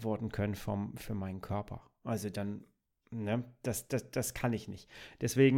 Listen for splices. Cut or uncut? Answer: uncut